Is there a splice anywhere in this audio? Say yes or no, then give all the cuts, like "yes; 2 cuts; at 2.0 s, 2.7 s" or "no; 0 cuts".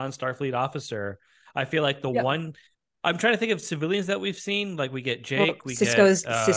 no; 0 cuts